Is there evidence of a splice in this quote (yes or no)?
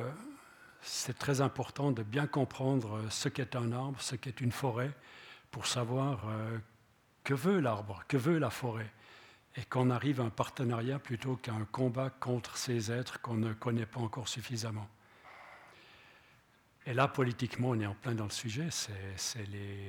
no